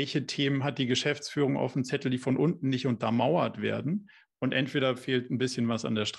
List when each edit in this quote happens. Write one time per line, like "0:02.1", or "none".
0:04.3